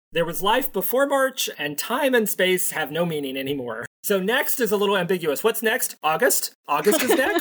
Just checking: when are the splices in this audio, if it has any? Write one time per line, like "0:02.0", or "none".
0:01.5